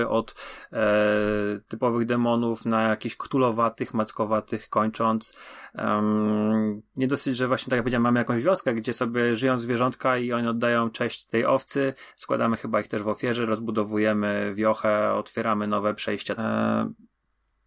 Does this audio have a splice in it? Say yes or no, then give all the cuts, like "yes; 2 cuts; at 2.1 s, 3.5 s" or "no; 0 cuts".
yes; 2 cuts; at 11.3 s, 16.4 s